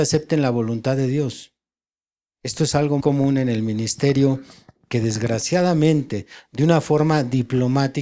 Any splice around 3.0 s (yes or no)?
yes